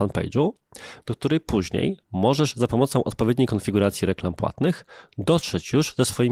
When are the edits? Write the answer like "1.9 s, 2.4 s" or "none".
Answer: 1.0 s

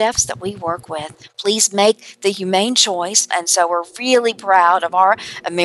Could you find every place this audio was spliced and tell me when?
1.3 s, 3.3 s

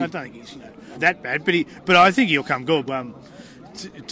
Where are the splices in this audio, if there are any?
0.9 s, 2.9 s

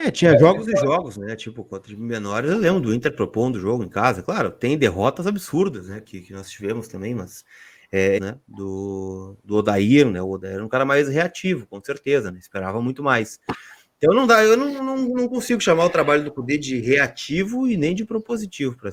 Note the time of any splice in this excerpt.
8.2 s

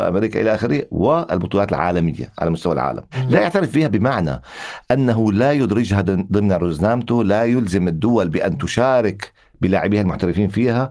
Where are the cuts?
none

